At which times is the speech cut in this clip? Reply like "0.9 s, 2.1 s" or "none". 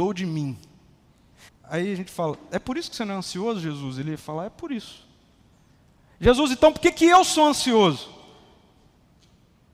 1.5 s